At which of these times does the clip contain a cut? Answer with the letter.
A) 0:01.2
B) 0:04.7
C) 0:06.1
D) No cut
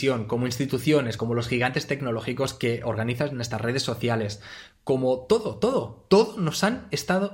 A